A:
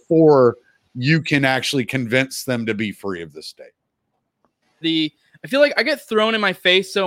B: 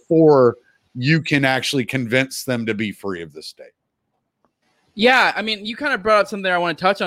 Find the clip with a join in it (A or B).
A